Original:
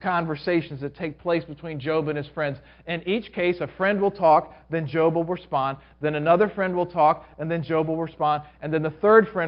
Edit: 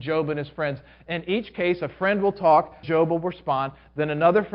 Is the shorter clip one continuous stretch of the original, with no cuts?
no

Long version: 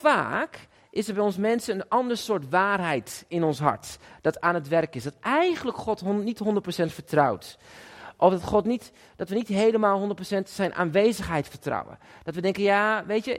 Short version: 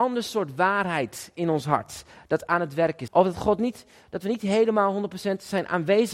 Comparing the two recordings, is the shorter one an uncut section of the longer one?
no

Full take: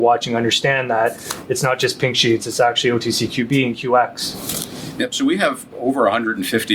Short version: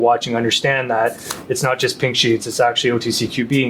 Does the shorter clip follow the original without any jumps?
yes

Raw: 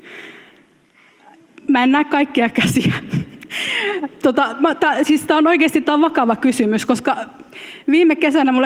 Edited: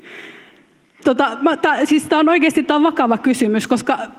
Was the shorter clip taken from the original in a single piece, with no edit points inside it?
no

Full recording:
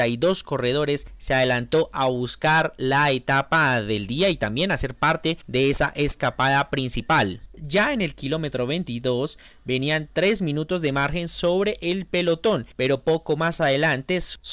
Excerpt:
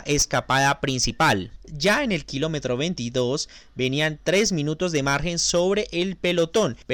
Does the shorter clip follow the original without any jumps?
yes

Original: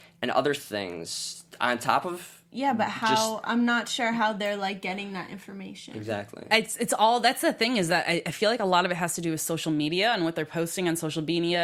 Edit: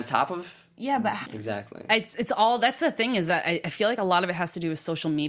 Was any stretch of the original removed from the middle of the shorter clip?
yes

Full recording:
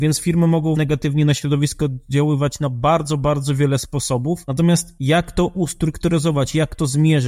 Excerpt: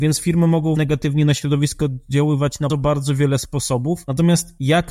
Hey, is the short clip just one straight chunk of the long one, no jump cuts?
no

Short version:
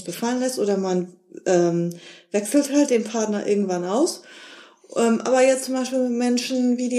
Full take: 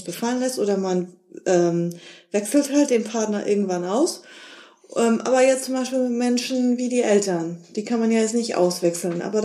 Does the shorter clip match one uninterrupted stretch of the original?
yes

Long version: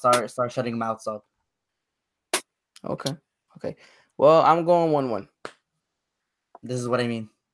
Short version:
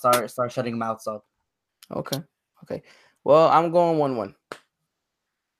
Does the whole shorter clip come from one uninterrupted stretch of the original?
no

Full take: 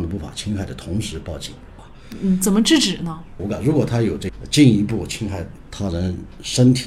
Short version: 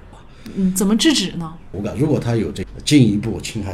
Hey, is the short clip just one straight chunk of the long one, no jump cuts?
yes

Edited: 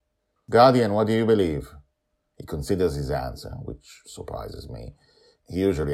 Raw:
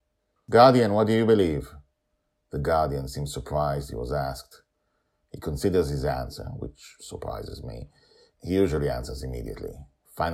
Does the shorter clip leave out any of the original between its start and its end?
yes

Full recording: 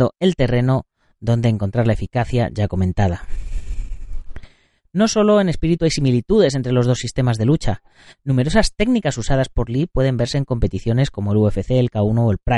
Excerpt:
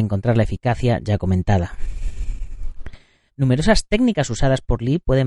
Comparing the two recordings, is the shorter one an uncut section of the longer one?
no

